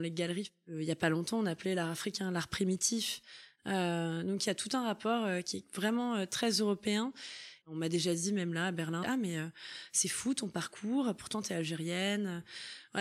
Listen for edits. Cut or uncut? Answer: cut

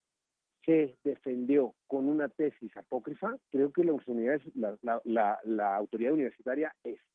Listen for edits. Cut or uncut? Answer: cut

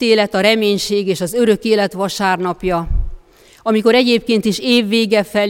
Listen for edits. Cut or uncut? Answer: uncut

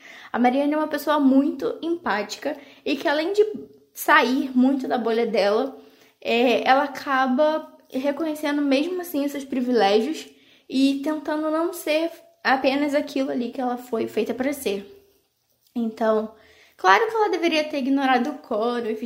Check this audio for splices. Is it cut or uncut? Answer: uncut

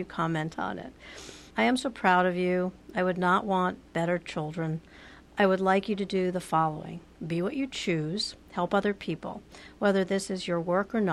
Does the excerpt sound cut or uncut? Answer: uncut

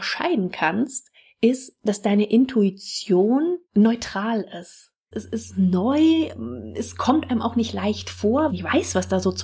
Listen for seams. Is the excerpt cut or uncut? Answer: cut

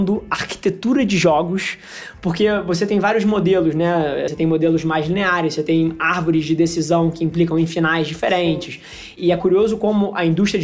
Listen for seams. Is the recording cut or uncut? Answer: cut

